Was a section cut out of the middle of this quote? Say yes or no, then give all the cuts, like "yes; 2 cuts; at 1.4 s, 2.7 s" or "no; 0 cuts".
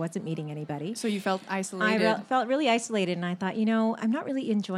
no; 0 cuts